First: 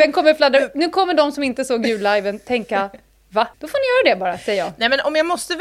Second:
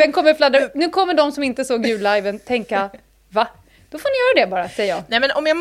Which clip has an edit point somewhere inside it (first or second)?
first